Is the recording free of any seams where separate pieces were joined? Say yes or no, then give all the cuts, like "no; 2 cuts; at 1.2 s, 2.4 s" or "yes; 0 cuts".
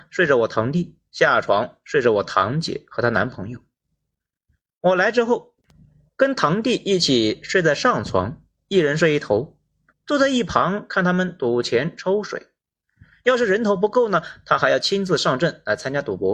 no; 1 cut; at 9.9 s